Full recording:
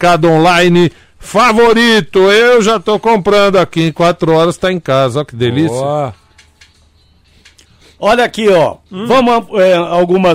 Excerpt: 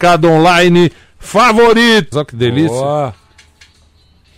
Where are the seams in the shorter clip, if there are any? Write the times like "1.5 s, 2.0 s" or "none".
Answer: 2.1 s